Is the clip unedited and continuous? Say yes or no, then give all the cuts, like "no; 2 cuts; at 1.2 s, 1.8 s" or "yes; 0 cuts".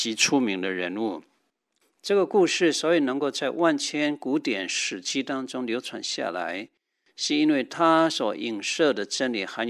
yes; 0 cuts